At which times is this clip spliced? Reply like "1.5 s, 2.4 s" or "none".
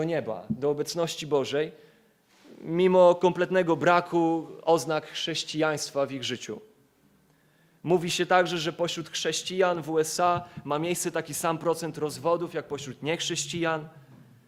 none

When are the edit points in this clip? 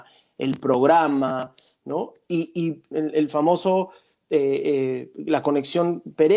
2.9 s

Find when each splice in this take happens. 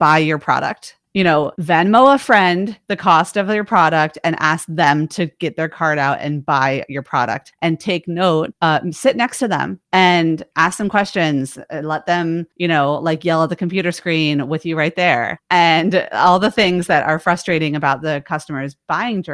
none

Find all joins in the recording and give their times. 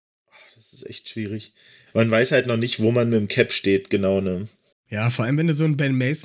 4.7 s

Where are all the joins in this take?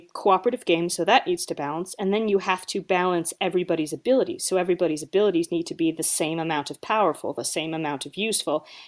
none

